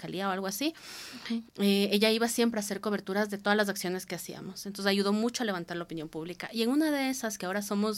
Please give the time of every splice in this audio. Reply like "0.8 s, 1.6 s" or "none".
1.5 s